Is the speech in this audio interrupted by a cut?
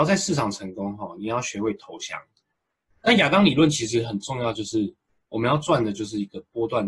yes; 1 cut; at 2.9 s

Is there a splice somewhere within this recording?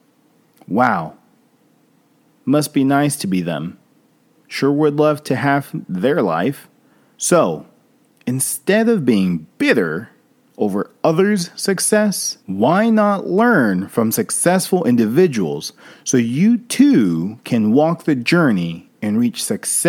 yes; 2 cuts; at 7.1 s, 12.4 s

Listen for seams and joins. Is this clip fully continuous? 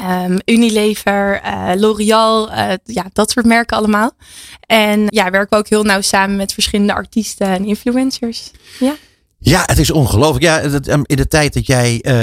no; 1 cut; at 5.1 s

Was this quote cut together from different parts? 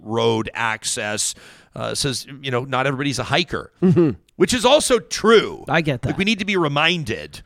no; 0 cuts

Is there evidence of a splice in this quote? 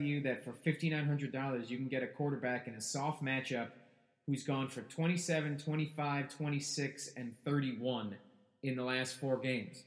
no; 0 cuts

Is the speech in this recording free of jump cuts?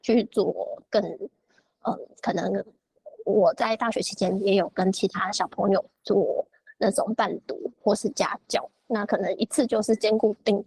yes; 0 cuts

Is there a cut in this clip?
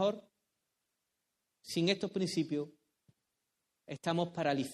no; 0 cuts

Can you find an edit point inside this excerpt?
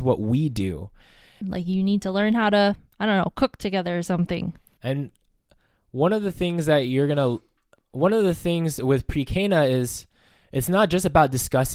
yes; 2 cuts; at 1.4 s, 4.8 s

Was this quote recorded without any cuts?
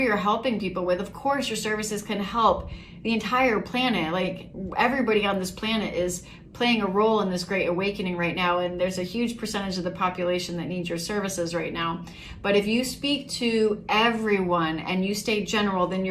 yes; 0 cuts

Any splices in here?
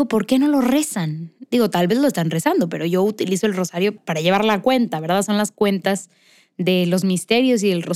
yes; 1 cut; at 4.0 s

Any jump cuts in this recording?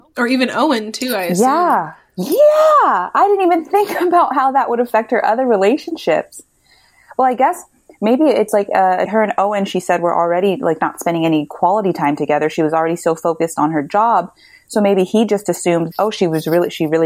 yes; 2 cuts; at 9.1 s, 15.9 s

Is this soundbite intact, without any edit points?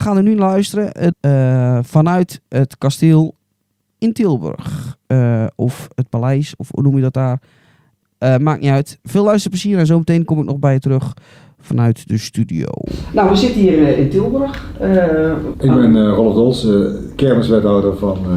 no; 3 cuts; at 1.1 s, 9.0 s, 15.5 s

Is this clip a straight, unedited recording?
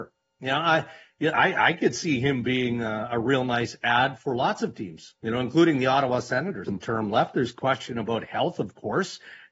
no; 1 cut; at 6.7 s

